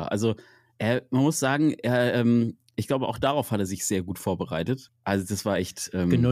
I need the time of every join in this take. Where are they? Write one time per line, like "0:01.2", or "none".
0:04.9